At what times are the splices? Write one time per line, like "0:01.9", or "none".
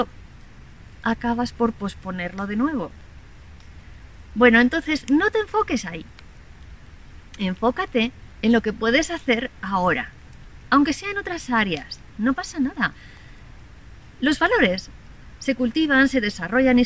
none